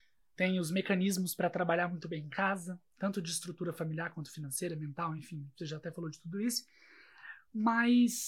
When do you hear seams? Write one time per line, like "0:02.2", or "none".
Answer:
none